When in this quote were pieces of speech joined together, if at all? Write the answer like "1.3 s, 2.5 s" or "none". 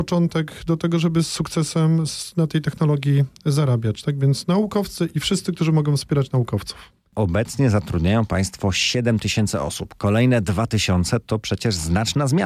none